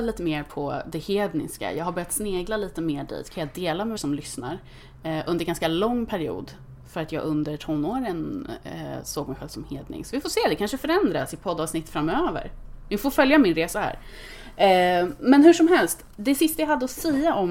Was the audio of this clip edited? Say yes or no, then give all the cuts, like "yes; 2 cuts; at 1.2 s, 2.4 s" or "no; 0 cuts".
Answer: yes; 1 cut; at 4.0 s